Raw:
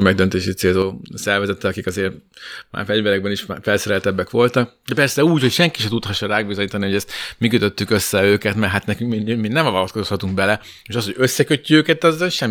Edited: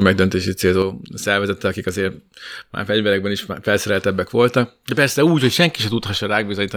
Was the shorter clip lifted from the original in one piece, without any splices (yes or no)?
yes